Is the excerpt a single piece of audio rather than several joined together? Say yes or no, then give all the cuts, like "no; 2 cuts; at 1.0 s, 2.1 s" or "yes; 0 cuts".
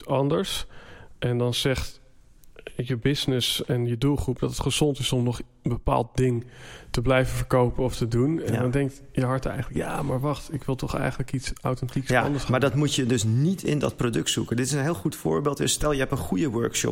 yes; 0 cuts